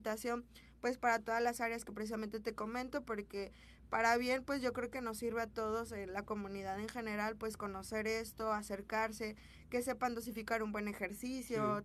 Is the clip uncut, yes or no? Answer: yes